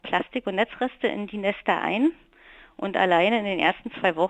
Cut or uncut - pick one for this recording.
uncut